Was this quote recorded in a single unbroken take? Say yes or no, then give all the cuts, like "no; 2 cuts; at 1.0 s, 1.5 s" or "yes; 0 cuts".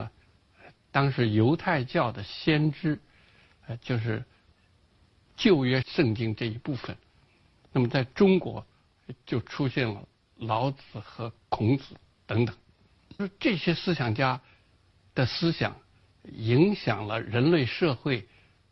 no; 1 cut; at 5.8 s